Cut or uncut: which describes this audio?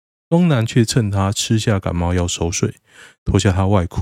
uncut